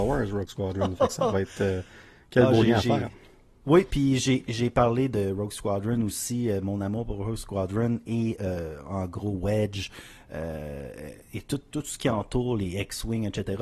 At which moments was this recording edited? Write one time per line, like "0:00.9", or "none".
none